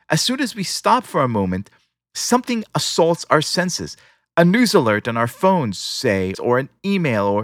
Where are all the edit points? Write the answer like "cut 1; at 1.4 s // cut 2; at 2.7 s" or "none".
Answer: cut 1; at 6.3 s